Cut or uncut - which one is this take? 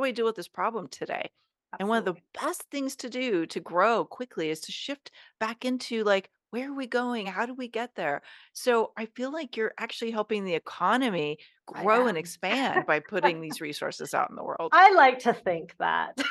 uncut